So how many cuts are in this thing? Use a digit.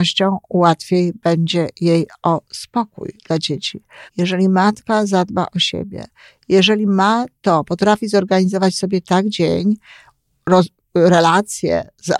1